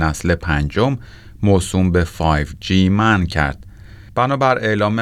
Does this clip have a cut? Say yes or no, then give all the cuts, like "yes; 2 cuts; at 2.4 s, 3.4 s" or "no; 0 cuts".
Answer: yes; 1 cut; at 4.1 s